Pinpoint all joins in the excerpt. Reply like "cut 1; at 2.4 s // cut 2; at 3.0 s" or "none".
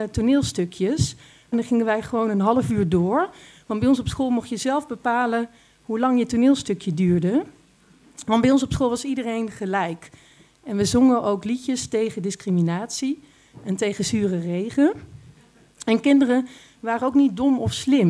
none